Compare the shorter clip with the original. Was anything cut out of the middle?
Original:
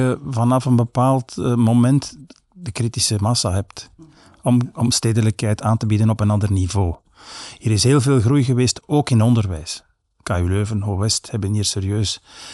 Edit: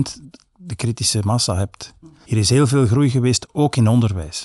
yes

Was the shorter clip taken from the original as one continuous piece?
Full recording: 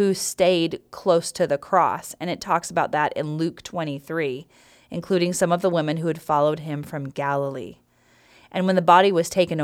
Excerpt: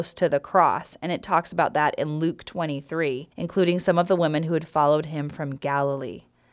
no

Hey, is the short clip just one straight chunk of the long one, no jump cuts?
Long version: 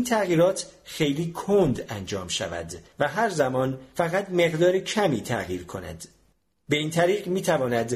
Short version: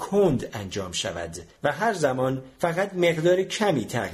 yes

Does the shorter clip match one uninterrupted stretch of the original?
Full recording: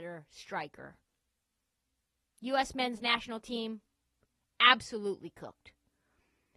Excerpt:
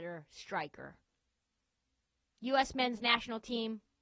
yes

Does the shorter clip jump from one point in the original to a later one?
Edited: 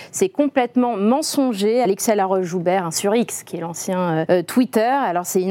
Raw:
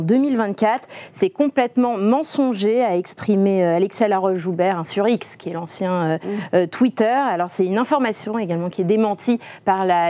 yes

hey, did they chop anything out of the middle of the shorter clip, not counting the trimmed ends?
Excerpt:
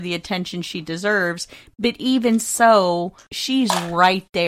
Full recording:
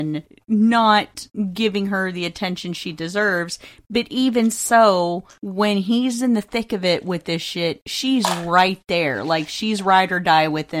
yes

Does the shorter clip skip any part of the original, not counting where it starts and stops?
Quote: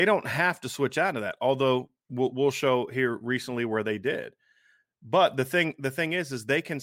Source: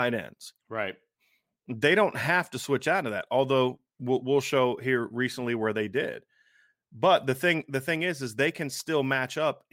no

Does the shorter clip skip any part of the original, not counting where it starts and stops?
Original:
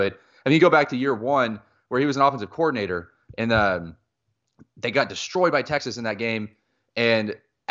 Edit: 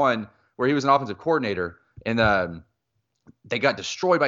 no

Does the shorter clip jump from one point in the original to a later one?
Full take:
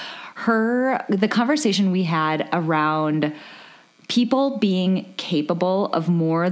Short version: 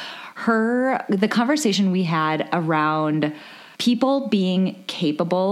yes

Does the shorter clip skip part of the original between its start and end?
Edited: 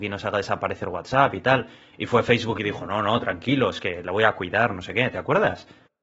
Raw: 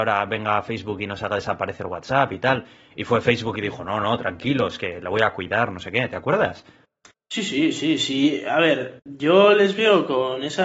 no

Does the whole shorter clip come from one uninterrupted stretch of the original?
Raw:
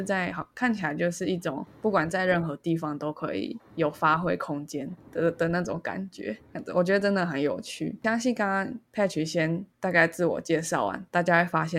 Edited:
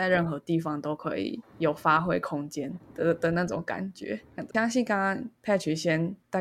no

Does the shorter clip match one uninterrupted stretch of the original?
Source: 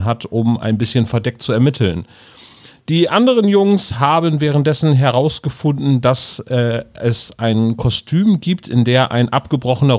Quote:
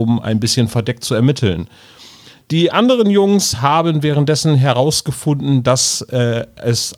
yes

